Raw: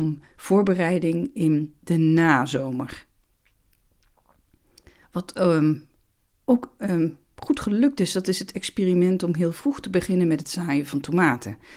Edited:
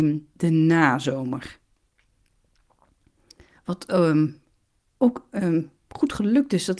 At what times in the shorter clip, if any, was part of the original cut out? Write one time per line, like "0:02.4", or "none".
none